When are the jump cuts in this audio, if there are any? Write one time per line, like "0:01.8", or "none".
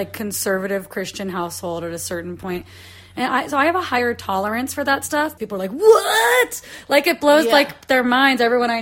0:05.4